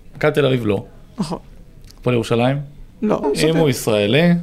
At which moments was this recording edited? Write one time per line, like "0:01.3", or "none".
0:03.2